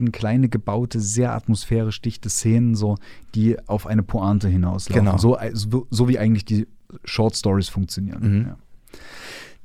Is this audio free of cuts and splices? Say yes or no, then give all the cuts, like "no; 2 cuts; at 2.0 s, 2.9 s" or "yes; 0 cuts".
yes; 0 cuts